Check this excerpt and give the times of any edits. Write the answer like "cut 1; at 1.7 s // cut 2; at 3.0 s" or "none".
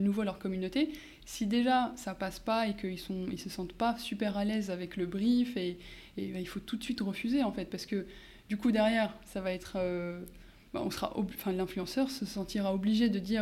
none